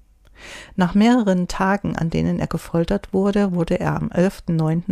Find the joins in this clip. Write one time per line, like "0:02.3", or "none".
none